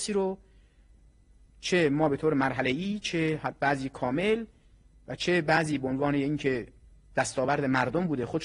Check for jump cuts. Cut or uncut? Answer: uncut